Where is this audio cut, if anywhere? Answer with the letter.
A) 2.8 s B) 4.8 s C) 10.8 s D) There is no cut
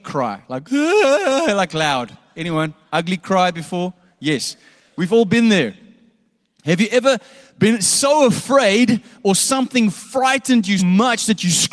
C